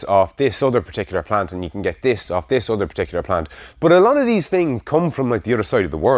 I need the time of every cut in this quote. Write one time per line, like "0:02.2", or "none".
0:03.7